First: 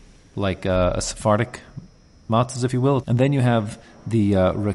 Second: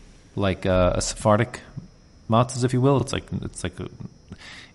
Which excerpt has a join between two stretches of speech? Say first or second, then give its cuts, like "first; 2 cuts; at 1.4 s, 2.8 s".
first; 1 cut; at 3.0 s